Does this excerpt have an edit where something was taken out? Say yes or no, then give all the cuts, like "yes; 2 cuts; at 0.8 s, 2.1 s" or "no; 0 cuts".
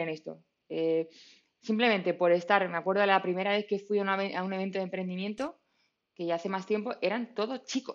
no; 0 cuts